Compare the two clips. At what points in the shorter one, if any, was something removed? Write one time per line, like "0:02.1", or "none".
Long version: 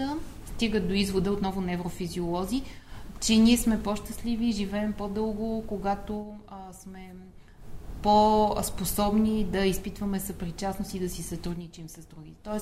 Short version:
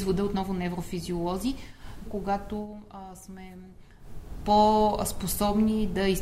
0:02.0